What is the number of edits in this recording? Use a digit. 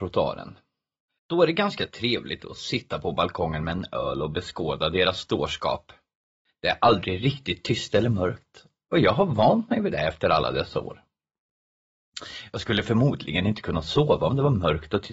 2